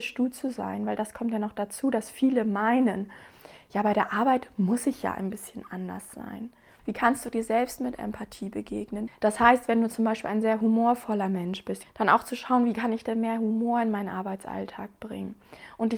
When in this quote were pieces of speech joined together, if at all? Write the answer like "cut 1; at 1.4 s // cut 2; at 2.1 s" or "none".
cut 1; at 6.8 s // cut 2; at 9.1 s // cut 3; at 11.8 s